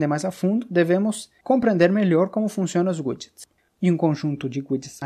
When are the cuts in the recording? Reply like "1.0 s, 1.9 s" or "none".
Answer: 3.7 s